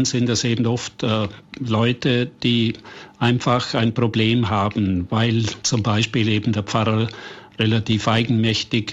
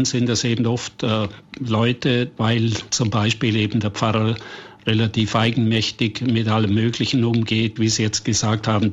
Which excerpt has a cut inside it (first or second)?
second